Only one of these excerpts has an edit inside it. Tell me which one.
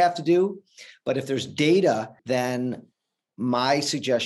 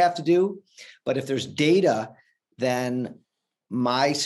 first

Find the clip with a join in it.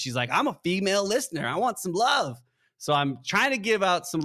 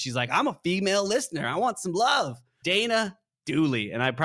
second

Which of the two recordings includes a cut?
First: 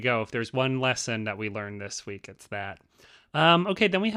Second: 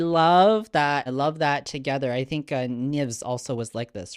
second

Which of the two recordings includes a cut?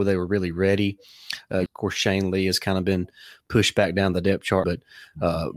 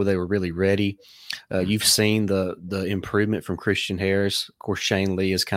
first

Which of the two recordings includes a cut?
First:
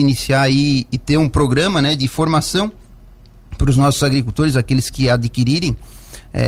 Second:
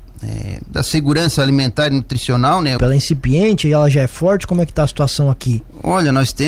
second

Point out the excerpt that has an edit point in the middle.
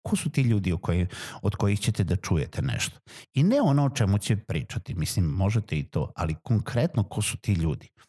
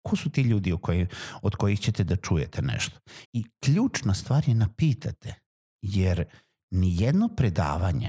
second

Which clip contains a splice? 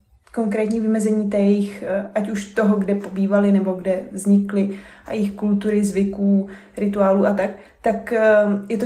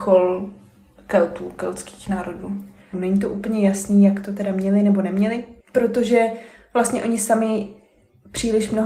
second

